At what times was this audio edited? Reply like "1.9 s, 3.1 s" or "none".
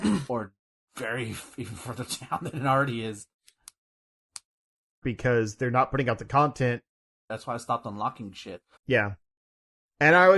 5.0 s, 7.3 s, 8.8 s